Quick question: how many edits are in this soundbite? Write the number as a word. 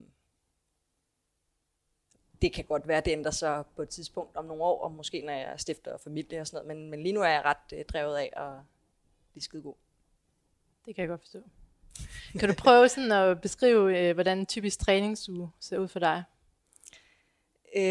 zero